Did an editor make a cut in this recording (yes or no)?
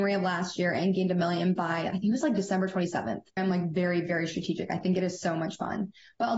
yes